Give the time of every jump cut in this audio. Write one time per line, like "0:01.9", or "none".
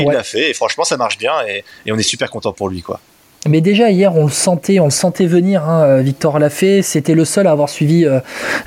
none